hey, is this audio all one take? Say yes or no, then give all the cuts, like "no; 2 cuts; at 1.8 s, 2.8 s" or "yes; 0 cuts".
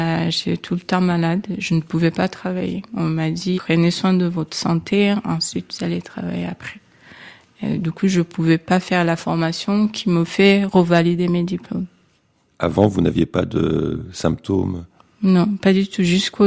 no; 1 cut; at 3.5 s